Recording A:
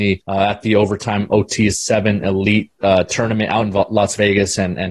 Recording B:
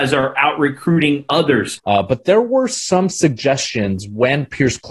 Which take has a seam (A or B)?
B